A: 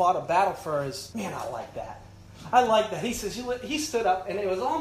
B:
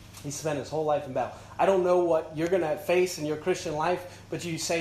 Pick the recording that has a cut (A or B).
A